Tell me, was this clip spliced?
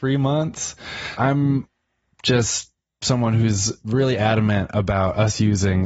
no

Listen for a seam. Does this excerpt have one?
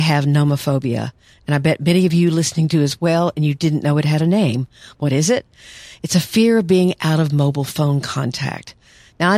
no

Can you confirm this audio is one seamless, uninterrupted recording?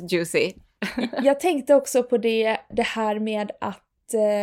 no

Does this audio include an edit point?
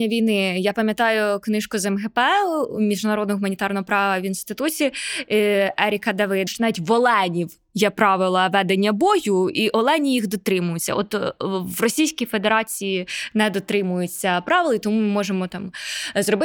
yes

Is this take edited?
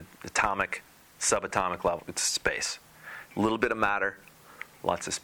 no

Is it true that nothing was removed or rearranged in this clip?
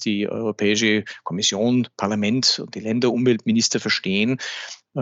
yes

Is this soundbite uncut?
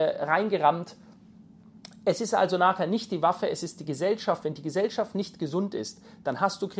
yes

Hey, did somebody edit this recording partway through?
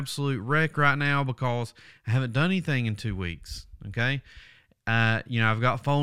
no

